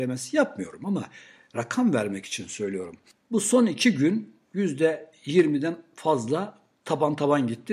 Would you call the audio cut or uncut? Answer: uncut